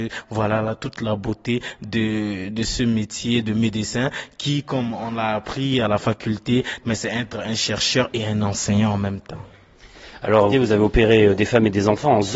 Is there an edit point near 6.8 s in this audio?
yes; 2 cuts; at 6.8 s, 10.5 s

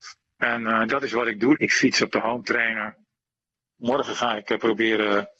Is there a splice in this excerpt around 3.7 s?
no; 1 cut; at 1.5 s

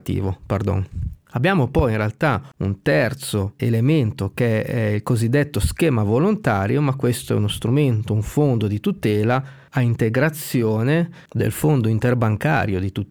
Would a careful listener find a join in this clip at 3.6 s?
yes; 1 cut; at 3.6 s

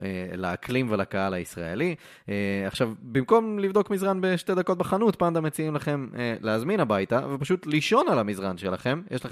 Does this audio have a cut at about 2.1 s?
no; 0 cuts

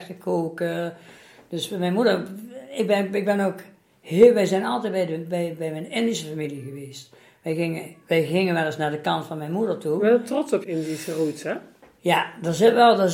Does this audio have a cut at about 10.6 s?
yes; 1 cut; at 10.6 s

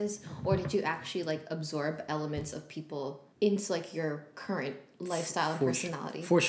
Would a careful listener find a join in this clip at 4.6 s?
no; 1 cut; at 3.3 s

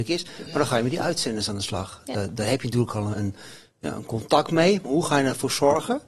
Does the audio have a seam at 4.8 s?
no; 1 cut; at 3.1 s

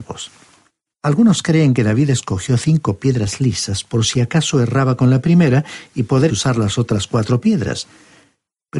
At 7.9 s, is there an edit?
no; 2 cuts; at 0.9 s, 6.3 s

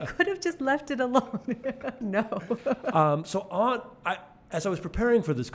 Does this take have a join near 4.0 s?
no; 1 cut; at 2.0 s

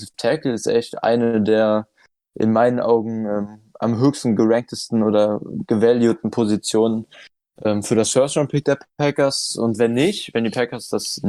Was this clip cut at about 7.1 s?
no; 0 cuts

